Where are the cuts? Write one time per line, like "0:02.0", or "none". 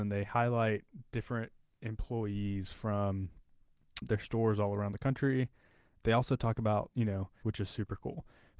0:07.4